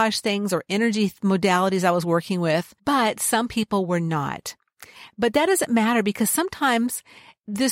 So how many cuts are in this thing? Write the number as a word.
one